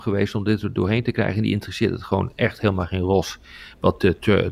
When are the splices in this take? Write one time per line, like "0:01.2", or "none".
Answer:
none